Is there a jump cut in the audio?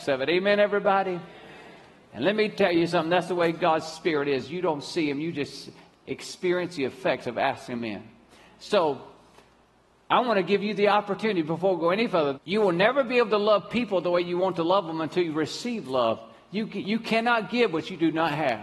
yes; 1 cut; at 12.3 s

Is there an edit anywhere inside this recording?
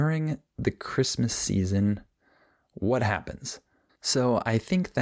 yes; 1 cut; at 3.9 s

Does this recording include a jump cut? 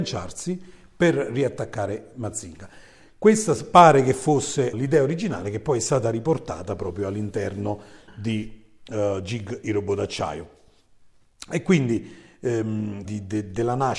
yes; 2 cuts; at 4.7 s, 13.1 s

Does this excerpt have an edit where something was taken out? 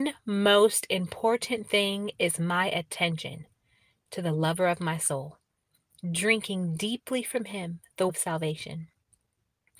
yes; 1 cut; at 8.1 s

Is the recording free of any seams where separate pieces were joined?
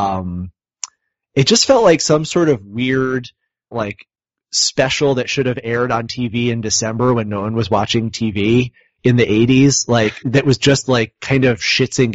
no; 2 cuts; at 3.7 s, 10.2 s

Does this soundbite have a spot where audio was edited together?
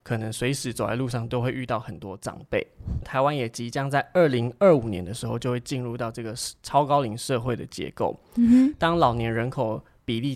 yes; 1 cut; at 3.0 s

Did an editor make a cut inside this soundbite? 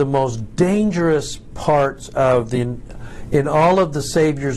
no; 0 cuts

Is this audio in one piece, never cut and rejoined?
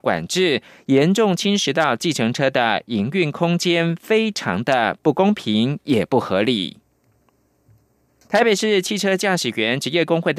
no; 1 cut; at 8.2 s

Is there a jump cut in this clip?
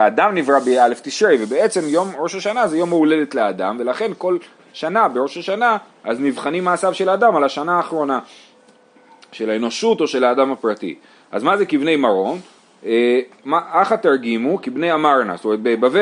no; 0 cuts

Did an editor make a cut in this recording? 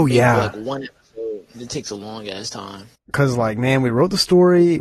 yes; 2 cuts; at 1.5 s, 2.9 s

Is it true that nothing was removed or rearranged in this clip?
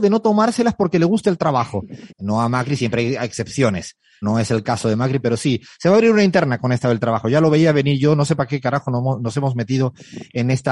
no; 2 cuts; at 2.1 s, 4.2 s

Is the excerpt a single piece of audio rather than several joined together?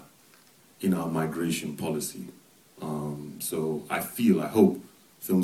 yes; 0 cuts

